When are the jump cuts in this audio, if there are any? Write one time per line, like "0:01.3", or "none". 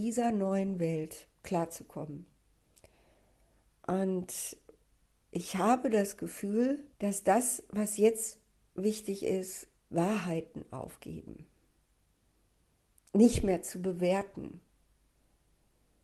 0:06.9
0:09.8
0:13.0

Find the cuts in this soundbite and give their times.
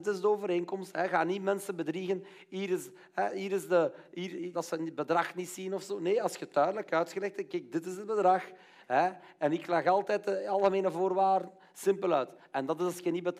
0:04.5

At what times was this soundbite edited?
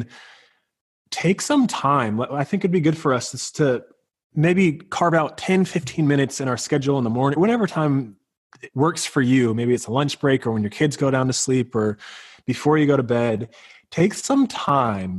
0:07.4

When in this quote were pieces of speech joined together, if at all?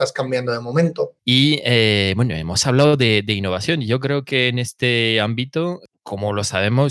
0:01.2

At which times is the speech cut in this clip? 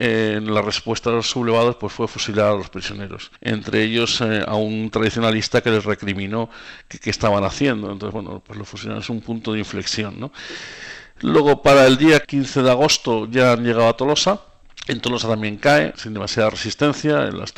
none

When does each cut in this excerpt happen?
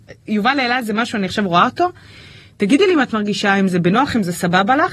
none

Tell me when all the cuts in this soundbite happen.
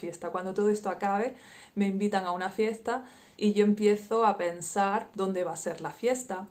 0:03.4
0:05.1

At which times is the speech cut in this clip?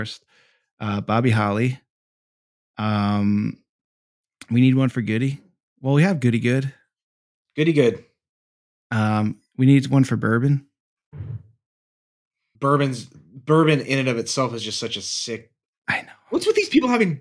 0:12.5

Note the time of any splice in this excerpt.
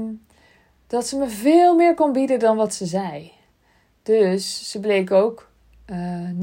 none

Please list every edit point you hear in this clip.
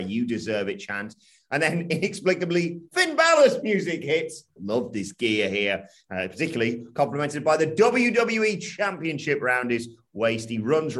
0:04.6

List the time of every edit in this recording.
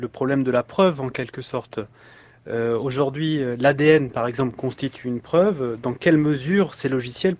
none

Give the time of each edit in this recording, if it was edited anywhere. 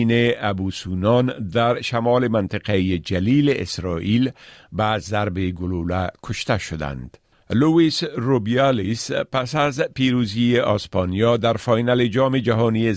0:07.3

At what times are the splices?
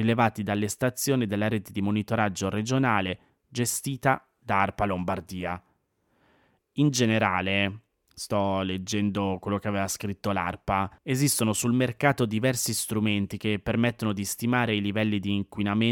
0:11.0

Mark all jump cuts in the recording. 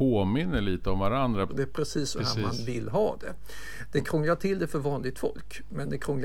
0:01.5

